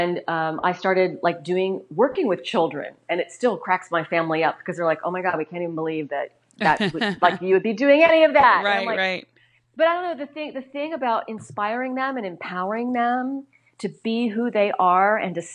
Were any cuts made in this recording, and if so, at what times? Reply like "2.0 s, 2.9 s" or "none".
none